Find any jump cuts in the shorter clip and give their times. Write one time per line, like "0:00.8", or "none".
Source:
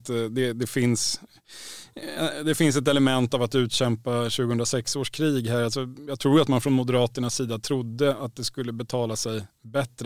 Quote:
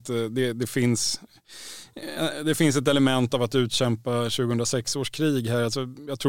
none